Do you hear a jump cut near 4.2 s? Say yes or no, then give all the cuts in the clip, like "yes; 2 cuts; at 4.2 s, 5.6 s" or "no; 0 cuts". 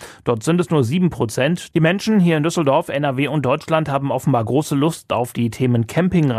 no; 1 cut; at 1.7 s